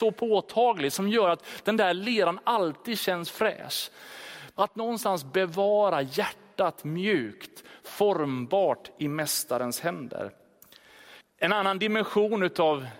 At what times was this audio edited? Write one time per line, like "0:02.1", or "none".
0:04.6
0:11.2